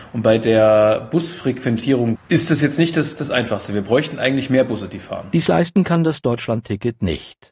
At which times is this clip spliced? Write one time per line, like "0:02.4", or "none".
0:02.2

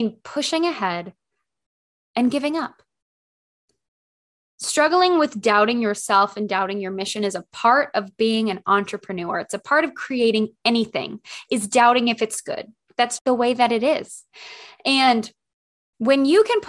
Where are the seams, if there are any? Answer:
0:13.2

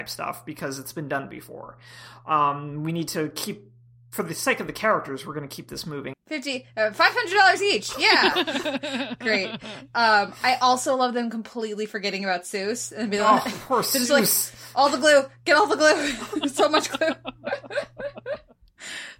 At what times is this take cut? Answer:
0:06.1

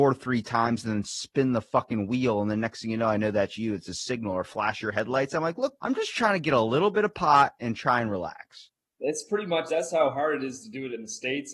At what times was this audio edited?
0:05.8

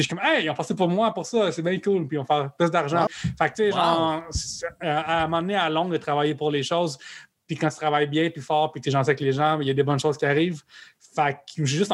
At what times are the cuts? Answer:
0:03.1

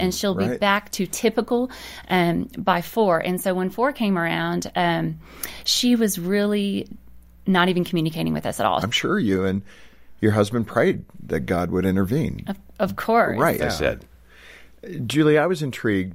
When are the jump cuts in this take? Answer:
0:08.8
0:13.6

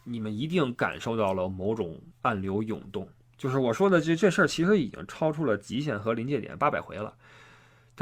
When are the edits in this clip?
0:02.1

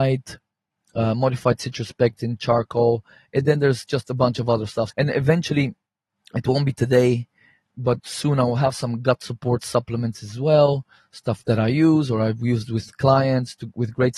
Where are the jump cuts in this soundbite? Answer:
0:04.9

